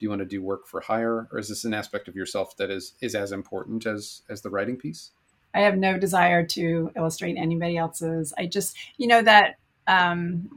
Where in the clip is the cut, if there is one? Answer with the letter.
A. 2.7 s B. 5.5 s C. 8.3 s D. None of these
B